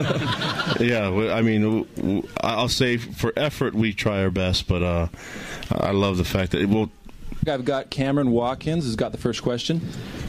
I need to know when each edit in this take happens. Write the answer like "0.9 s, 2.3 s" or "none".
7.4 s